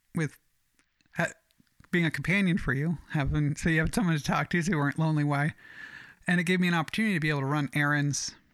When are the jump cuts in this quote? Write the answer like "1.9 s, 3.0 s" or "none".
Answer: none